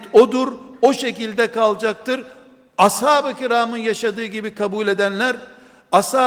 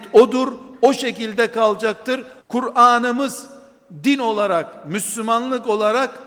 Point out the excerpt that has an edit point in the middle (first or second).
second